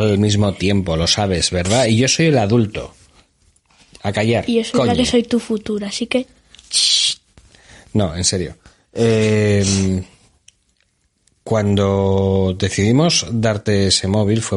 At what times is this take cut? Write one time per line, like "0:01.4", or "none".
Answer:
none